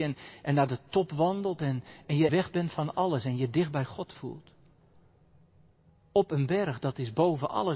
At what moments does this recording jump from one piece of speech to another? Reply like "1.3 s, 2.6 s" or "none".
2.3 s